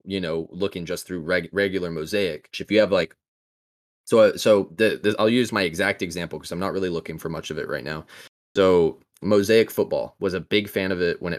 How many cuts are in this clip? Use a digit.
1